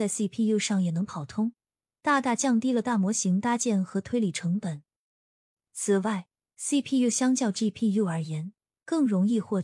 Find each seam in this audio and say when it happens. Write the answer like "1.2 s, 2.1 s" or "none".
none